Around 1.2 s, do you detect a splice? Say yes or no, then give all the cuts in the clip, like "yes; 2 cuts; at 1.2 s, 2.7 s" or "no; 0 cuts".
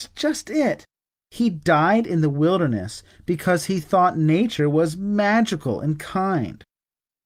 no; 0 cuts